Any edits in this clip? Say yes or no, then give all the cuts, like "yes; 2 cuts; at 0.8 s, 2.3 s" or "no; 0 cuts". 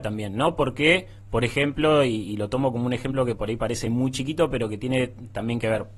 no; 0 cuts